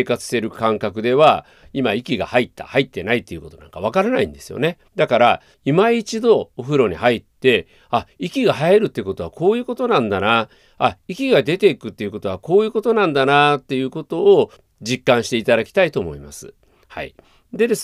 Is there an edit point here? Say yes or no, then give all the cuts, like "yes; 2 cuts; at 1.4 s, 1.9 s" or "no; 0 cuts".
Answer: yes; 2 cuts; at 4.9 s, 16.8 s